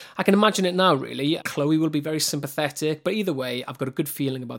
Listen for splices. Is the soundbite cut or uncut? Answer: cut